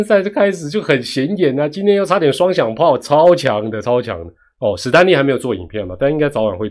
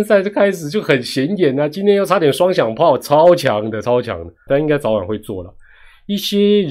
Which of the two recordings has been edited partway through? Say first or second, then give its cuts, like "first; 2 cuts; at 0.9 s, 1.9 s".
second; 1 cut; at 4.5 s